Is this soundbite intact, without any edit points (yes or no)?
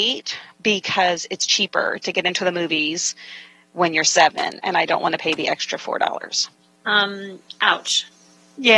yes